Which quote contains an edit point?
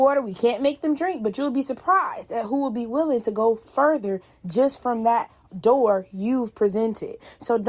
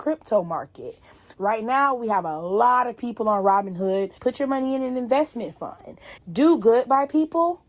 second; 3 cuts; at 1.3 s, 4.2 s, 6.2 s

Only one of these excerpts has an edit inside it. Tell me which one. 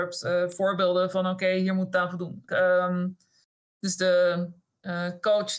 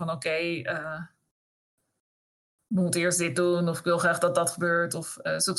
first; 1 cut; at 2.5 s

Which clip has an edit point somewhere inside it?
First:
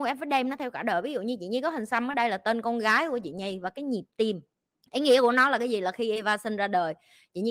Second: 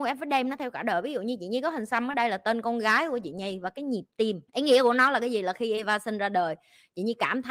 second; 1 cut; at 4.5 s

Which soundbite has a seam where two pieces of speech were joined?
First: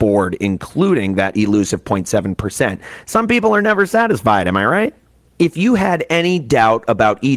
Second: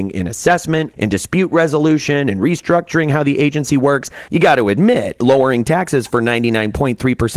second; 2 cuts; at 0.9 s, 4.3 s

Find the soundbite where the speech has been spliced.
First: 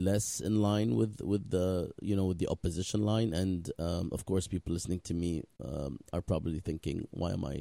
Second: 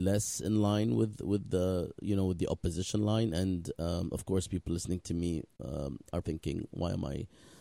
second; 1 cut; at 6.2 s

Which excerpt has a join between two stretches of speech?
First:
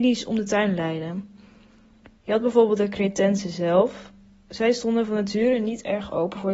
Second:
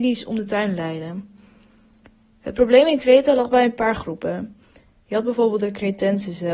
first; 1 cut; at 2.2 s

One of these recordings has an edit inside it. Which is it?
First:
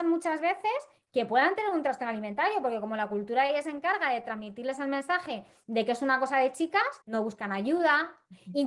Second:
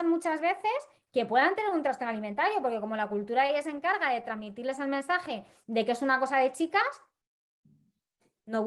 first; 1 cut; at 7.0 s

